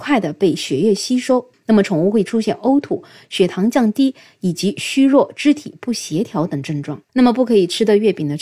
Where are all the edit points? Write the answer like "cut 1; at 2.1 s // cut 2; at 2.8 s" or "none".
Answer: cut 1; at 1.5 s // cut 2; at 7.1 s